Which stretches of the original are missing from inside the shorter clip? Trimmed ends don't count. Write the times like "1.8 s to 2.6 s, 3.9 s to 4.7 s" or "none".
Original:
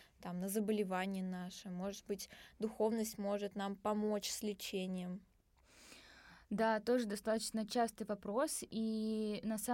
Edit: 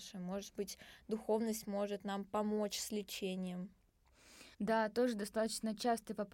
6.0 s to 6.4 s